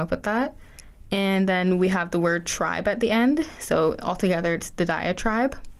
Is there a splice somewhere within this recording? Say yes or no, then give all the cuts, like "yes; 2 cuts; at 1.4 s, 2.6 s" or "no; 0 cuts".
no; 0 cuts